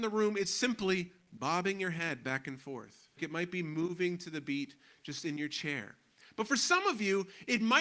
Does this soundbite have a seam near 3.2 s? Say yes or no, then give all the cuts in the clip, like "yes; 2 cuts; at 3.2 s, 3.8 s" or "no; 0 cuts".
yes; 1 cut; at 3.2 s